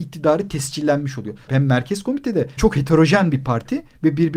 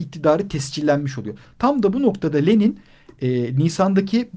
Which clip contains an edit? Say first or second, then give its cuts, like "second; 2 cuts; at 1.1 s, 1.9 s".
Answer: first; 2 cuts; at 1.5 s, 2.6 s